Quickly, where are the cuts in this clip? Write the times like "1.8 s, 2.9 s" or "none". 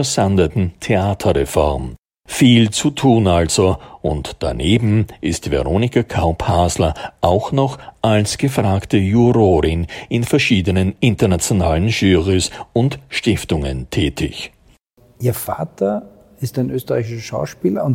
none